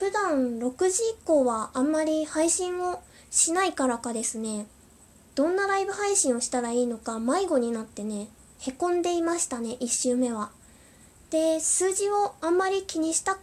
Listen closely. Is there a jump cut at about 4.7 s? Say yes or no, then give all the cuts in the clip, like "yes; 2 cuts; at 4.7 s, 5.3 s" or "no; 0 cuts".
no; 0 cuts